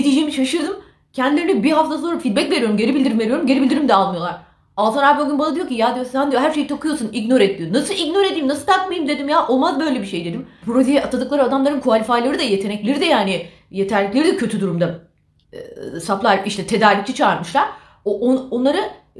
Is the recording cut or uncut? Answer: cut